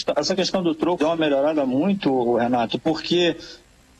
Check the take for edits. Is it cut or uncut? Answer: cut